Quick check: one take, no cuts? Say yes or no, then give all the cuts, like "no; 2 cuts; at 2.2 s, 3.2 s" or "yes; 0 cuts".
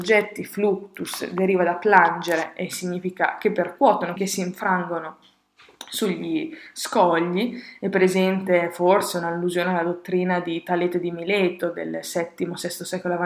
no; 1 cut; at 4.1 s